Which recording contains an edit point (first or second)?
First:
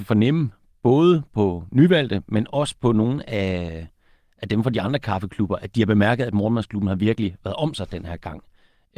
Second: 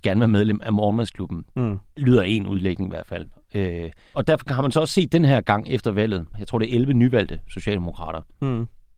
second